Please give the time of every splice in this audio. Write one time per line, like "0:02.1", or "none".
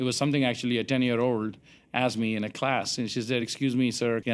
none